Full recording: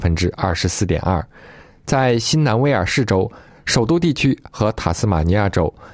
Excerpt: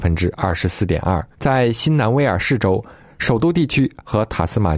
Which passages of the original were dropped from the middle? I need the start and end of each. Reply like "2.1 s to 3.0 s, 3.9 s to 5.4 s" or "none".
1.3 s to 1.8 s